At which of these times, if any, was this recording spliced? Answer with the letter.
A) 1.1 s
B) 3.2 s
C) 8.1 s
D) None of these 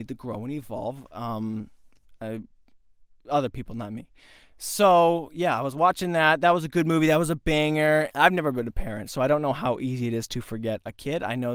C